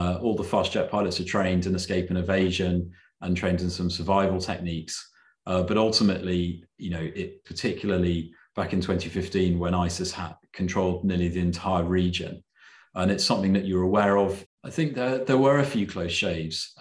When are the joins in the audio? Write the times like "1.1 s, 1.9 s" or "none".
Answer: 7.4 s, 14.4 s